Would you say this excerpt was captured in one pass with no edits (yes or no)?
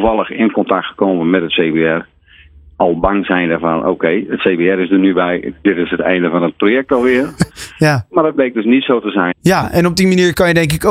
no